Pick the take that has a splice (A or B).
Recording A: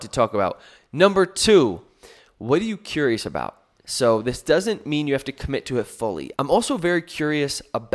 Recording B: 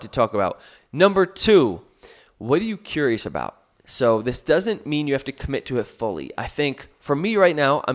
A